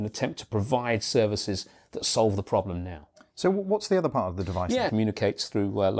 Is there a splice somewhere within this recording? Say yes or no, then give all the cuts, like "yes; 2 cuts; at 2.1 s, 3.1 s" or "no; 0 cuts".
yes; 1 cut; at 4.9 s